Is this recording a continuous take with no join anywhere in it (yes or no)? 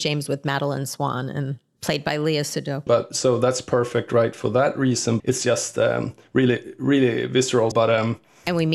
no